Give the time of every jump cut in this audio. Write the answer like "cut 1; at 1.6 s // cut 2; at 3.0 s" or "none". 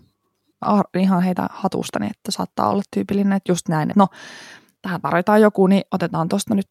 cut 1; at 3.9 s